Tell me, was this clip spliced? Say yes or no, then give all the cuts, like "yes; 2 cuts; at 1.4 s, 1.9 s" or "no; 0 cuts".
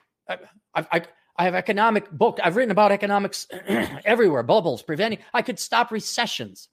no; 0 cuts